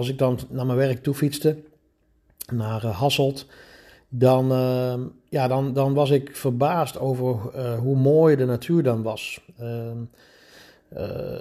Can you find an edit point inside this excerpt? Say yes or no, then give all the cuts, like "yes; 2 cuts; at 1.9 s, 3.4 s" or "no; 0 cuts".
no; 0 cuts